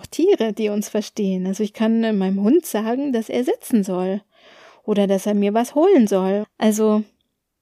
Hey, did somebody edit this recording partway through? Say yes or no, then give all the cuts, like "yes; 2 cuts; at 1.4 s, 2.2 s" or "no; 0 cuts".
yes; 1 cut; at 6.4 s